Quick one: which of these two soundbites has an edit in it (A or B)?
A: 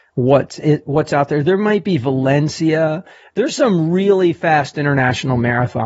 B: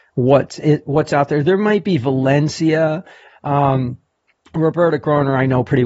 B